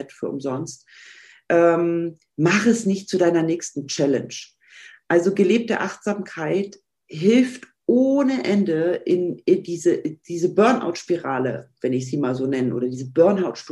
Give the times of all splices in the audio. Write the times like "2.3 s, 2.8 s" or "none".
none